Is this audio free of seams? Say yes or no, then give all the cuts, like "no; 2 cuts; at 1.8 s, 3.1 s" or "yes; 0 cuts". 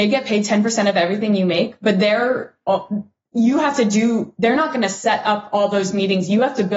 yes; 0 cuts